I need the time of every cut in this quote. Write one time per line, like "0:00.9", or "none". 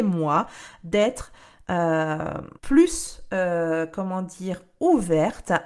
0:02.6